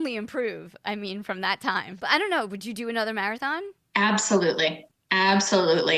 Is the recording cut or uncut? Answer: cut